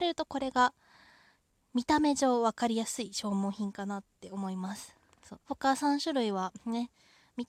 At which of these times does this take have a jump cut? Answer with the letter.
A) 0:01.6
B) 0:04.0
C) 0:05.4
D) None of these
C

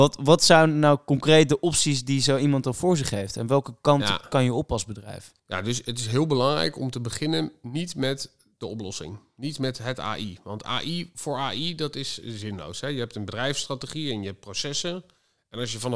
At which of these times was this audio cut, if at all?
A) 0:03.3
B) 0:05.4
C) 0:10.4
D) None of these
B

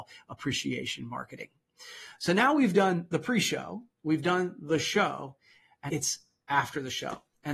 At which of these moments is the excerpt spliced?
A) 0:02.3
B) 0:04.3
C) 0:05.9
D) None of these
C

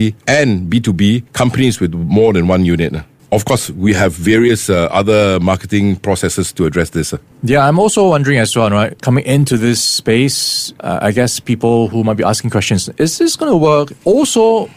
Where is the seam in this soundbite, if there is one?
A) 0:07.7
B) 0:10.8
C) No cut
B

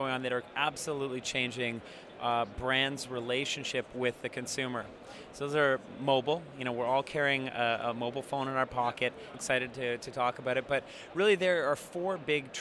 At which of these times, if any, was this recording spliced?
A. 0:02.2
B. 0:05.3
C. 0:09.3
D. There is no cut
C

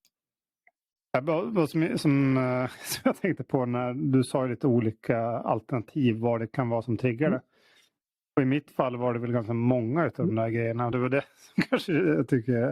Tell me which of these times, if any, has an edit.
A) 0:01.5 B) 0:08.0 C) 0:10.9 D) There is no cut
D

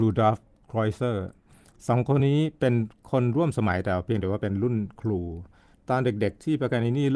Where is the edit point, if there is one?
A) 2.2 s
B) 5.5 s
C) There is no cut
A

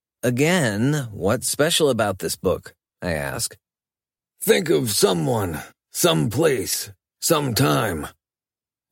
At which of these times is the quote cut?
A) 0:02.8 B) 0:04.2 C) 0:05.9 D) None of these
B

